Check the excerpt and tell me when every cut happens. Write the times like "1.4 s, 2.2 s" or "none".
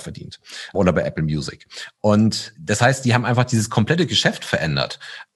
none